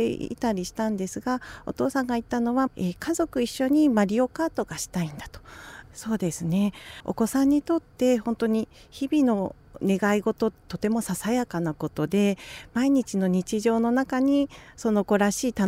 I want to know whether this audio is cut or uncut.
cut